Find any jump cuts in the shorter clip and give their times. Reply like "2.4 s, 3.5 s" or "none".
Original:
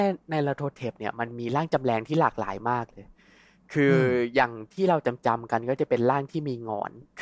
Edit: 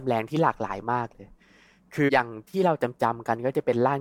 2.1 s